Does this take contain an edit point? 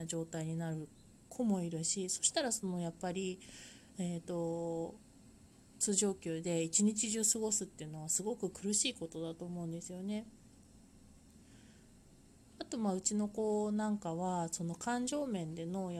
no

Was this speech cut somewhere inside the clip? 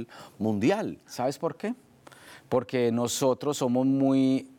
no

